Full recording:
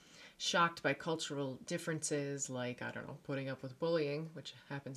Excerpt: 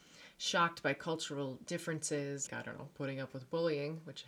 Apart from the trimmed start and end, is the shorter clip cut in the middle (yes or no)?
yes